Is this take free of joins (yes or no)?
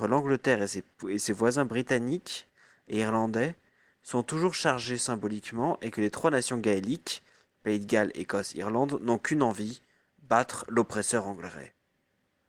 yes